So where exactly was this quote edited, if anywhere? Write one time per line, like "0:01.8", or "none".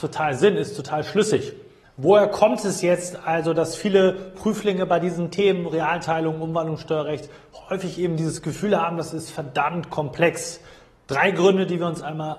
0:01.8